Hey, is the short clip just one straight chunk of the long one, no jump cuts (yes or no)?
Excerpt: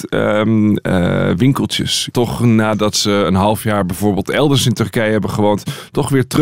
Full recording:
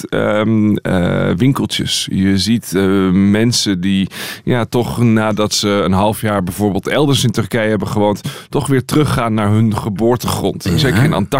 no